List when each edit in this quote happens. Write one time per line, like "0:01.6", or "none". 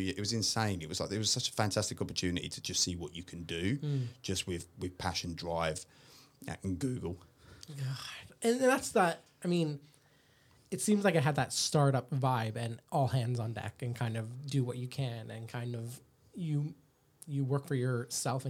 none